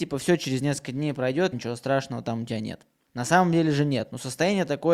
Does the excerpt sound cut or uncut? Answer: cut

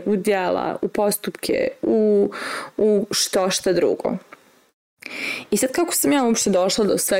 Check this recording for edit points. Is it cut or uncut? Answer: uncut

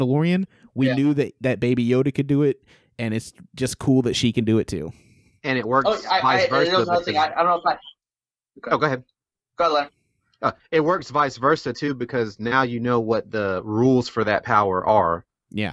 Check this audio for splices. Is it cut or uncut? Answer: uncut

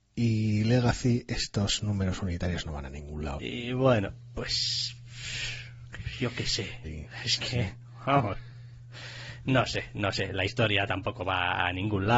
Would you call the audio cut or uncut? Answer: cut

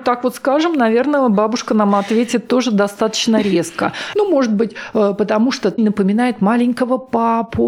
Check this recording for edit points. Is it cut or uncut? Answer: cut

